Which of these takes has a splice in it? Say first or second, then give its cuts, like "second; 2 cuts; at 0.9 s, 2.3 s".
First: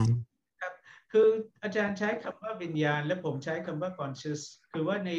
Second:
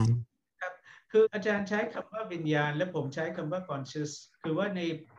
second; 1 cut; at 1.2 s